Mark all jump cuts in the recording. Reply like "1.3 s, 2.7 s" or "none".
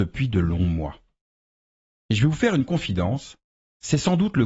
2.0 s